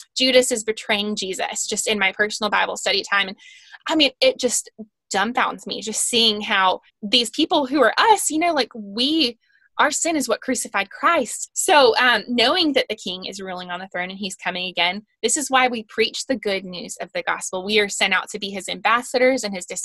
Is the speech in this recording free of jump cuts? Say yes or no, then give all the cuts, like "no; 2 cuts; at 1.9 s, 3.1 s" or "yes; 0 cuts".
no; 2 cuts; at 6.9 s, 11.5 s